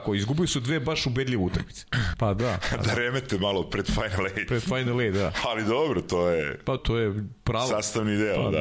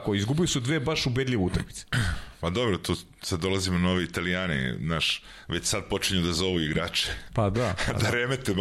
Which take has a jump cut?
first; 2 cuts; at 2.1 s, 6.8 s

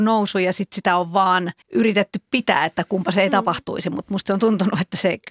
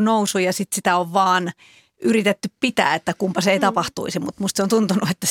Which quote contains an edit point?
first; 1 cut; at 1.6 s

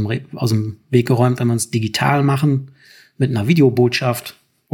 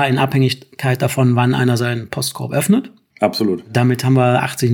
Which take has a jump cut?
second; 1 cut; at 3.1 s

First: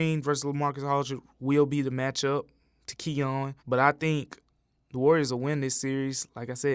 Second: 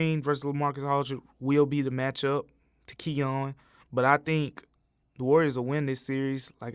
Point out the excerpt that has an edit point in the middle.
first; 1 cut; at 3.6 s

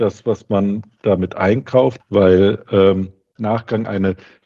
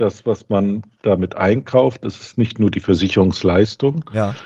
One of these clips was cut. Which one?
first; 2 cuts; at 2.0 s, 3.4 s

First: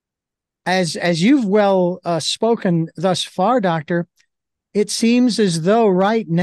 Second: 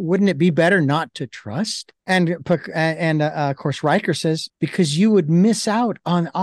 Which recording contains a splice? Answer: second; 2 cuts; at 2.0 s, 4.5 s

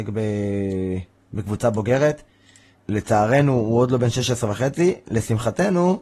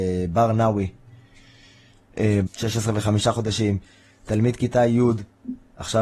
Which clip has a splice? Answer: second; 1 cut; at 2.5 s

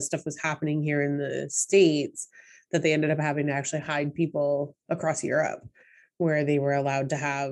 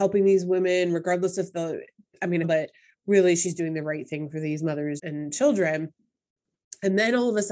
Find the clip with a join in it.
second; 2 cuts; at 2.4 s, 5.0 s

